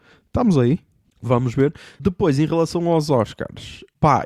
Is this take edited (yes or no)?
yes